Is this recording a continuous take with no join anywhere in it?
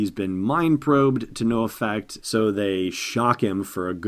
no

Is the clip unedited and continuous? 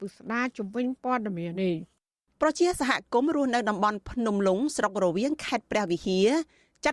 no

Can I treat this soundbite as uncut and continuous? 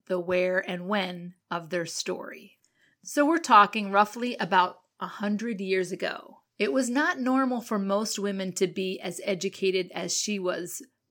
no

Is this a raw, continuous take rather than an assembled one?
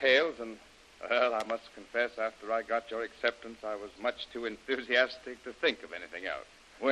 yes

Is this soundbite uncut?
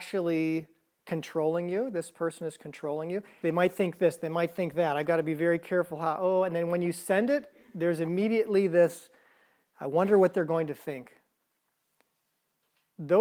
no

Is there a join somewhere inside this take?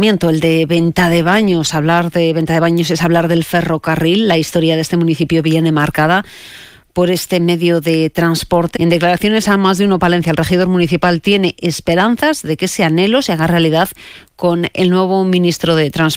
yes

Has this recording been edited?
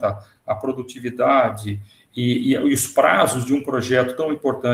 no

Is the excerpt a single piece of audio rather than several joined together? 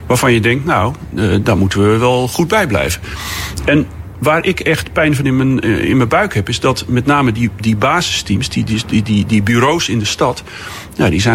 yes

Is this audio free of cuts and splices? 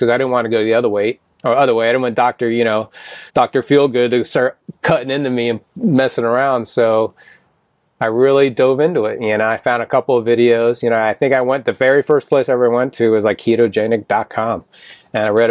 no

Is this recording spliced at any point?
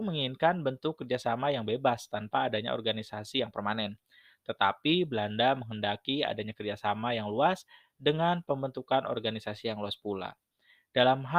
no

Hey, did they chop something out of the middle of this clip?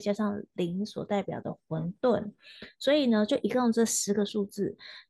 no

